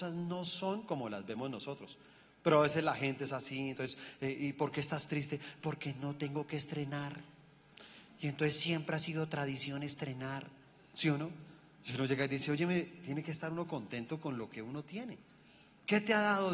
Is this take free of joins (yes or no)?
yes